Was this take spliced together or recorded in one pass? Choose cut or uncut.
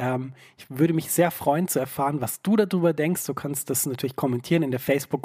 uncut